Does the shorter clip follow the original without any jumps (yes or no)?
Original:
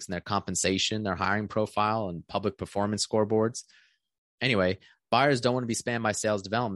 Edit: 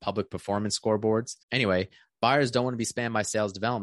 no